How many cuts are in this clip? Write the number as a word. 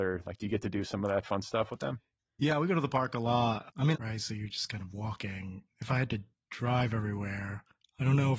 one